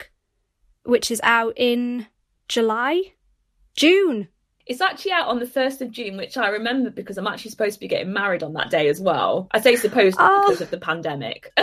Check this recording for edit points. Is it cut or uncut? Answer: uncut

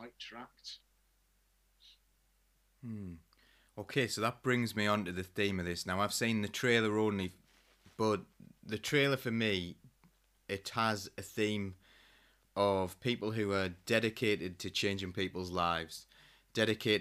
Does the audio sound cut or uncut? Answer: uncut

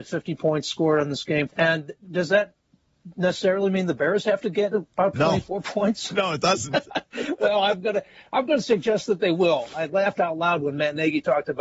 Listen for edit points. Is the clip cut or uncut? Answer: cut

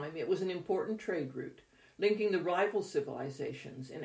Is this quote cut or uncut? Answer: uncut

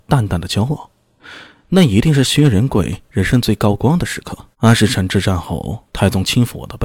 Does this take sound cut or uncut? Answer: cut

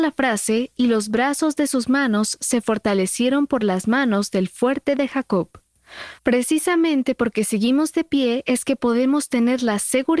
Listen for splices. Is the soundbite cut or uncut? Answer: cut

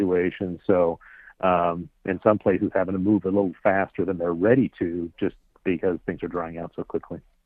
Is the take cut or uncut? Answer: uncut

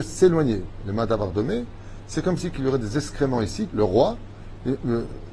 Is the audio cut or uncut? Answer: cut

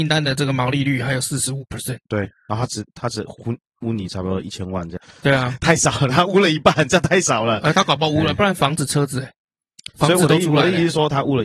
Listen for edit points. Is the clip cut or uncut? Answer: cut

